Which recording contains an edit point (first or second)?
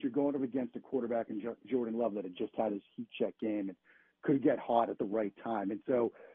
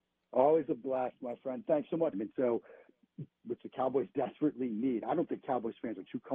second